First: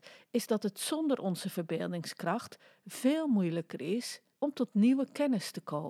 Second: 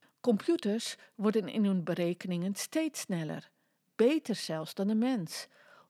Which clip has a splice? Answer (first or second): first